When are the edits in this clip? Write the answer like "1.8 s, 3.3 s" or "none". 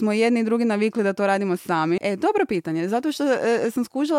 2.0 s